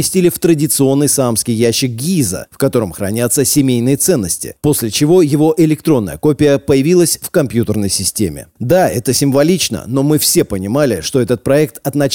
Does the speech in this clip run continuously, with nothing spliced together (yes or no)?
yes